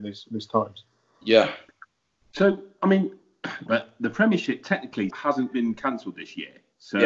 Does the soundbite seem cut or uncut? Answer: cut